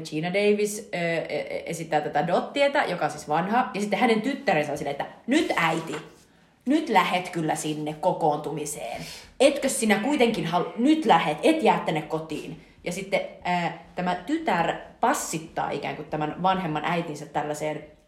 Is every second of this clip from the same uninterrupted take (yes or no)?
yes